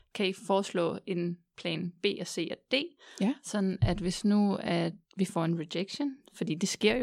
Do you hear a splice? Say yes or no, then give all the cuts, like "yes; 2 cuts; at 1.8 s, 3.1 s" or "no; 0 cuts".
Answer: yes; 1 cut; at 5.0 s